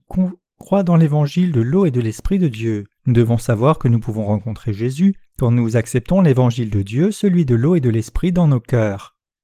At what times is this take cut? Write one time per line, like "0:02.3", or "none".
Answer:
0:03.0
0:05.3